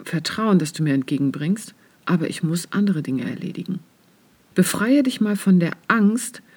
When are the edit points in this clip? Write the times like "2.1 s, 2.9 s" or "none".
4.5 s